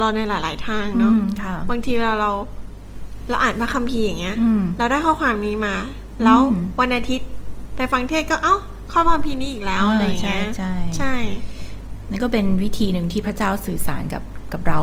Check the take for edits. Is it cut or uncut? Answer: uncut